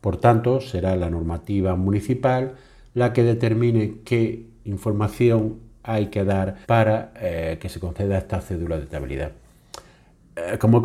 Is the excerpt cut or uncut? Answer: cut